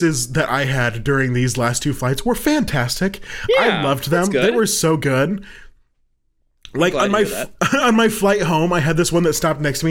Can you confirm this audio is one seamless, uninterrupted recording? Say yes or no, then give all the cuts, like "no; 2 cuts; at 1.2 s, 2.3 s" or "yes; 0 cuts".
yes; 0 cuts